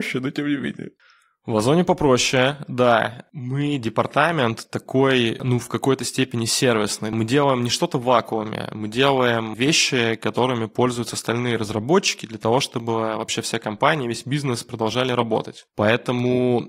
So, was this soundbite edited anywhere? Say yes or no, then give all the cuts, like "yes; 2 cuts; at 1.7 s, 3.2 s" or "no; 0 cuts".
no; 0 cuts